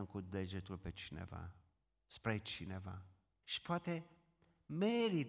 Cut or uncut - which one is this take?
cut